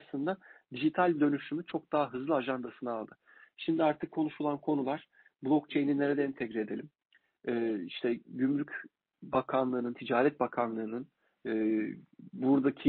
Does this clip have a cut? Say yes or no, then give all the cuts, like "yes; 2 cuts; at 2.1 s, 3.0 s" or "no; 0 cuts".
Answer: no; 0 cuts